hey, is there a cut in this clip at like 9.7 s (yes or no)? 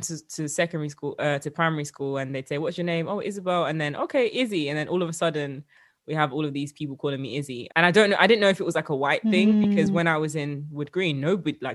no